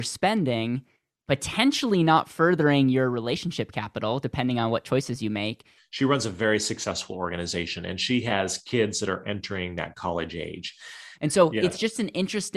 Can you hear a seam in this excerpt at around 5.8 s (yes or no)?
yes